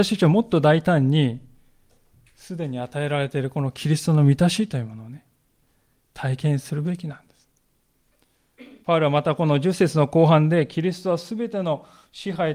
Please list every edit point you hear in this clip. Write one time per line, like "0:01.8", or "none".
0:08.8